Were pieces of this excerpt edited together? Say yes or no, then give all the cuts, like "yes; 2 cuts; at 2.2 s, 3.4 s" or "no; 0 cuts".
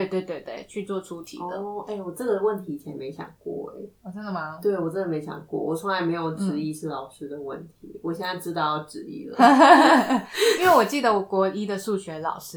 no; 0 cuts